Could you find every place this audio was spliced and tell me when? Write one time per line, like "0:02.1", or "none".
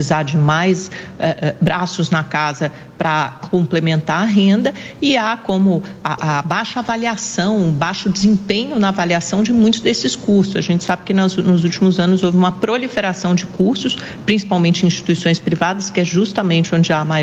0:06.2

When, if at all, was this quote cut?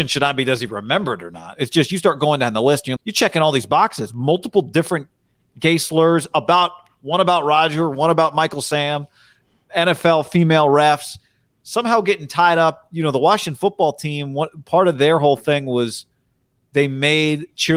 0:03.0

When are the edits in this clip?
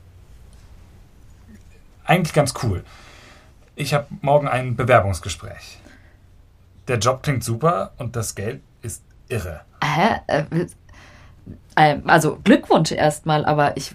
none

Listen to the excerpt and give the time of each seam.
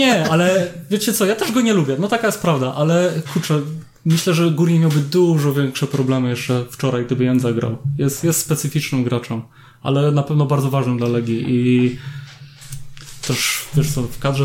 none

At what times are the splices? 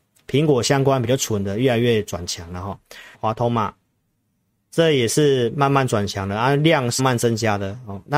0:03.1
0:07.0

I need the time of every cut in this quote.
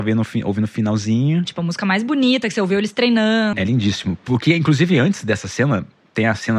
0:01.4
0:03.5

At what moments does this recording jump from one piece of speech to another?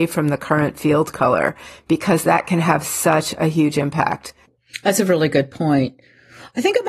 none

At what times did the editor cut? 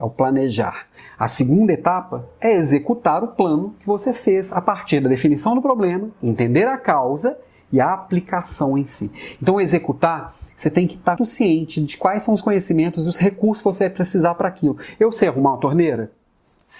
0:11.2

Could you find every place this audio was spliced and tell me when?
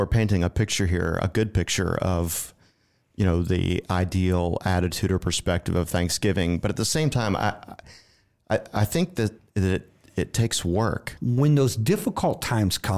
0:11.2

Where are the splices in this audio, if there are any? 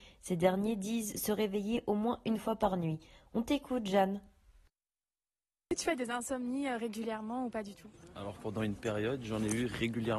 none

